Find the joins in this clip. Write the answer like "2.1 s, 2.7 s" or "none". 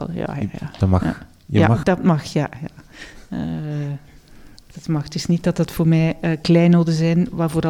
1.8 s